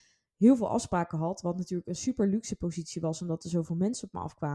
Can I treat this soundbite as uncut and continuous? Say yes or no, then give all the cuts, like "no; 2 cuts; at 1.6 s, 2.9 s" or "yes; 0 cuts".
yes; 0 cuts